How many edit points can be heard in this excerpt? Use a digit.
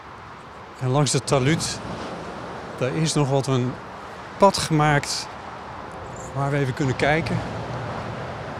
0